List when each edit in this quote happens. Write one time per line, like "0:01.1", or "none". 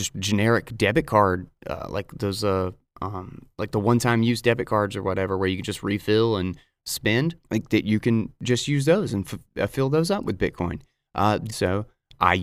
0:07.4
0:11.5